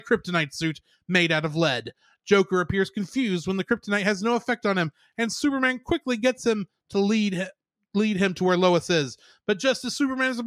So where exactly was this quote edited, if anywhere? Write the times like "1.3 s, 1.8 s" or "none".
none